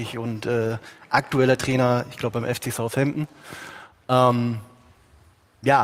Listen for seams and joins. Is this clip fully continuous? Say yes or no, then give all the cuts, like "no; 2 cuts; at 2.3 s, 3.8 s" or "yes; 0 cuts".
yes; 0 cuts